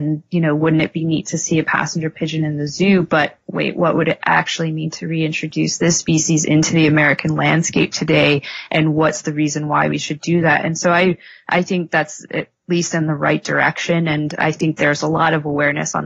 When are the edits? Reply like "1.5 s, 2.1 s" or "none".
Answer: none